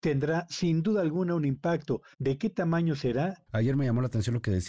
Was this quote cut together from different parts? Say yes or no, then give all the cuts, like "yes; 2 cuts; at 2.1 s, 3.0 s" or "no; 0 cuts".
yes; 2 cuts; at 2.1 s, 3.5 s